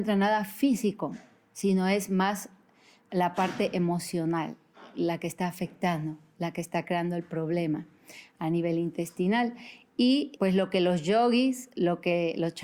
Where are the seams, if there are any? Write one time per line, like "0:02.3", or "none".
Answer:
0:10.4